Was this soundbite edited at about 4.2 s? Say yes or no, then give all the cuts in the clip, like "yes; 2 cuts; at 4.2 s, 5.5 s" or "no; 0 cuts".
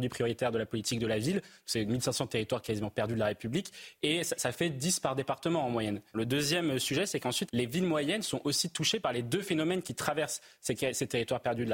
no; 2 cuts; at 6.1 s, 7.5 s